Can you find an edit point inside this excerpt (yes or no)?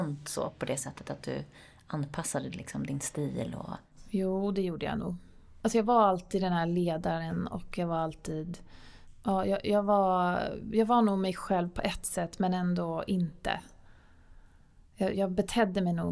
yes